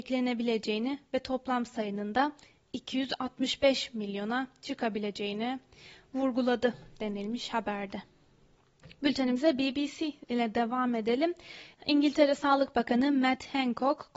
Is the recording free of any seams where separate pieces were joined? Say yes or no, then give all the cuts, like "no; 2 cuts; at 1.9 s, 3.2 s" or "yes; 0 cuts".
yes; 0 cuts